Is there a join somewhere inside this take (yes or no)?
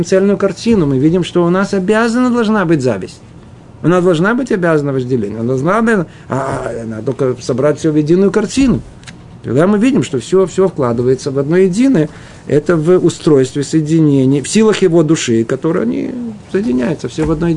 no